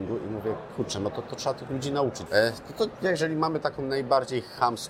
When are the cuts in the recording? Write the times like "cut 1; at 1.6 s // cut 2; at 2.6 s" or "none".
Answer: cut 1; at 2.3 s